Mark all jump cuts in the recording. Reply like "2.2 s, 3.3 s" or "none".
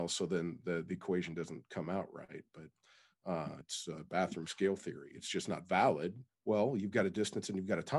3.6 s, 6.3 s